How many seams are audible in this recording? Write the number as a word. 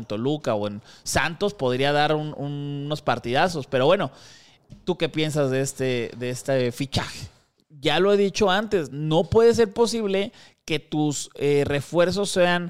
one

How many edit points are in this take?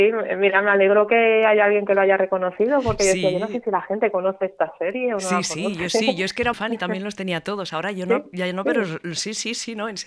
one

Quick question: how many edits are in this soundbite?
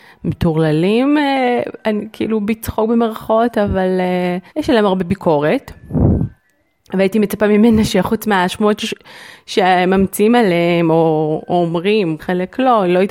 two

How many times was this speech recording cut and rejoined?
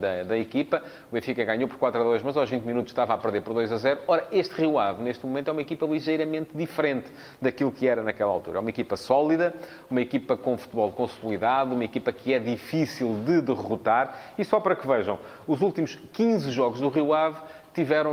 zero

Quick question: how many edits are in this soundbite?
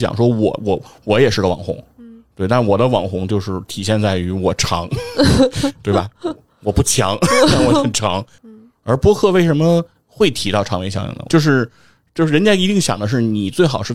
two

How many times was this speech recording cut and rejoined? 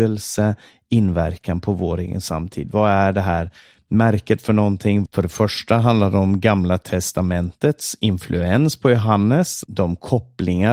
two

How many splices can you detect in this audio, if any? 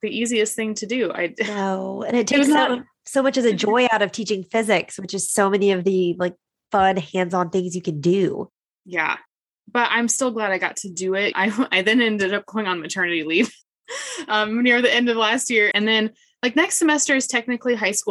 two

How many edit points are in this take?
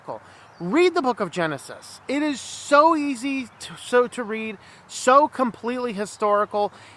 zero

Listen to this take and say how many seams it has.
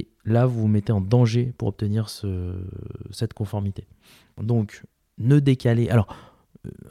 zero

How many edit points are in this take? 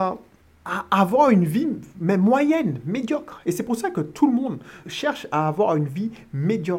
one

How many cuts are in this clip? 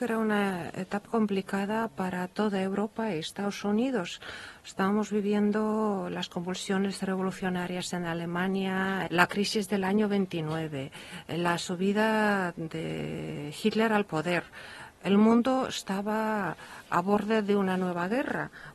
two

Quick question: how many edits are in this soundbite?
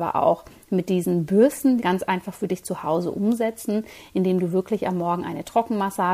one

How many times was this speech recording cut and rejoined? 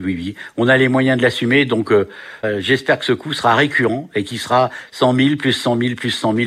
one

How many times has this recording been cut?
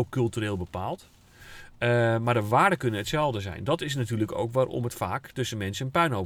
zero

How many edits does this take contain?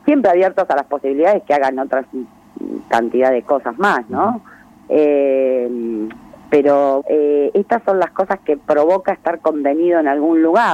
two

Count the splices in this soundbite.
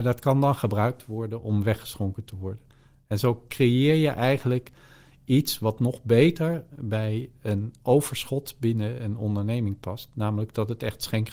zero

